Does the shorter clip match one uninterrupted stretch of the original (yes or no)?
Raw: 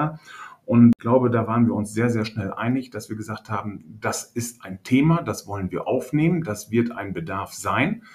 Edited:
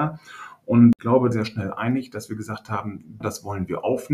no